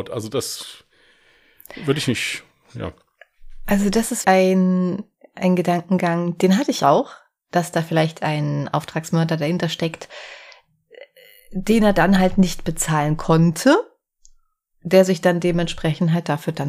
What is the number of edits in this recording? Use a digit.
1